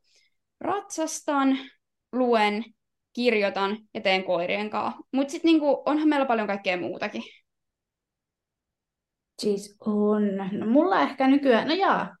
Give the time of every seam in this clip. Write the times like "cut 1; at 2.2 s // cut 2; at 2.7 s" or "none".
cut 1; at 5.1 s